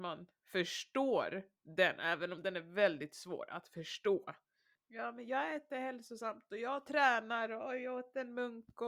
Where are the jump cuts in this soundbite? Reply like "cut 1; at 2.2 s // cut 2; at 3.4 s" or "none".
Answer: cut 1; at 4.7 s